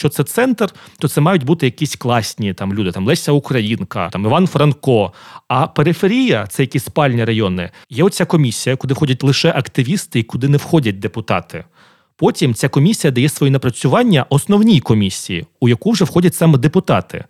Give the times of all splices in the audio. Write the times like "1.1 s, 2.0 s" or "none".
7.8 s